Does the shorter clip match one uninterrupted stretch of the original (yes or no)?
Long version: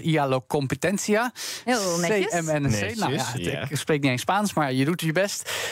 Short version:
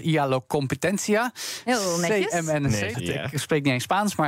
no